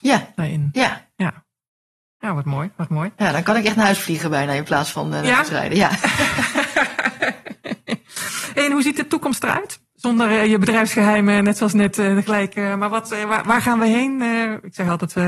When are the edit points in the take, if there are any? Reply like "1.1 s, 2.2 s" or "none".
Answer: none